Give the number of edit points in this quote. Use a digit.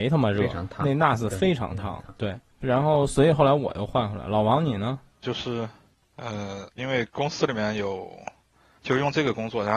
3